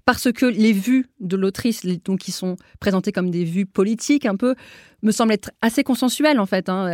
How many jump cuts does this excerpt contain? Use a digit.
0